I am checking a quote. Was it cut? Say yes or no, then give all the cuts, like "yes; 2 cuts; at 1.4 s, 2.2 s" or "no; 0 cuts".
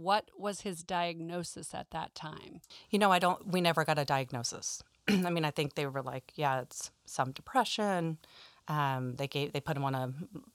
no; 0 cuts